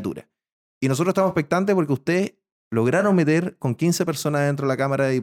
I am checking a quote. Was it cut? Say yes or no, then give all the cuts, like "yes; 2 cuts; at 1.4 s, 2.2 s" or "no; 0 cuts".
no; 0 cuts